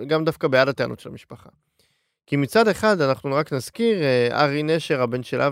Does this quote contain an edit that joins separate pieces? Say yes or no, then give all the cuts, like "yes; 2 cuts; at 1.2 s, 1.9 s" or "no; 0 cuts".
no; 0 cuts